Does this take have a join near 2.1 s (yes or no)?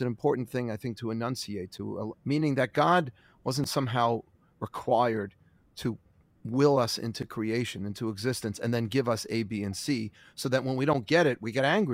yes